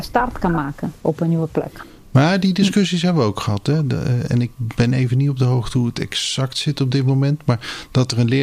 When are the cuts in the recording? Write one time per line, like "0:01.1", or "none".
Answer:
none